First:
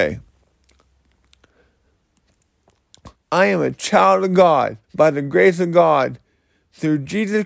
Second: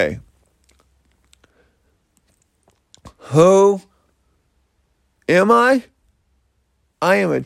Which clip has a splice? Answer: first; 2 cuts; at 3.1 s, 4.8 s

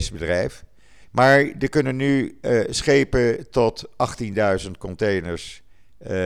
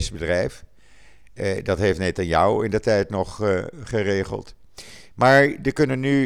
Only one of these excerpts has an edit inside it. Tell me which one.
first; 1 cut; at 1.0 s

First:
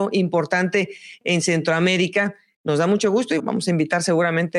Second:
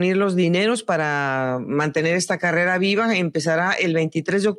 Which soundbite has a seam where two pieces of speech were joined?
first; 1 cut; at 3.4 s

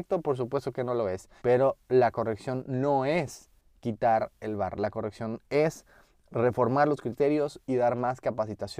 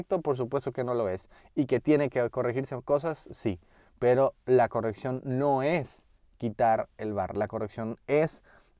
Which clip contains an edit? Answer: first; 1 cut; at 1.4 s

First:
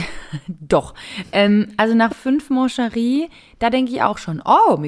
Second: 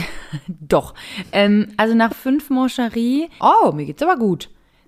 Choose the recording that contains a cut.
second; 1 cut; at 3.4 s

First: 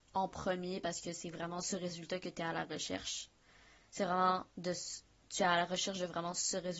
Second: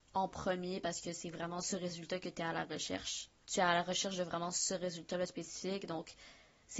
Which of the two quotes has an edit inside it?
second; 1 cut; at 3.4 s

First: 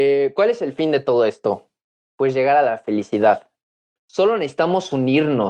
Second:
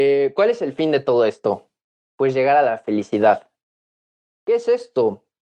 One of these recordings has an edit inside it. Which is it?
first; 1 cut; at 4.0 s

